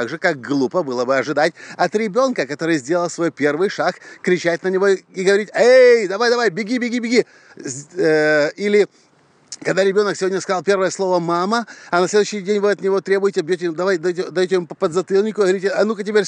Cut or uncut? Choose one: uncut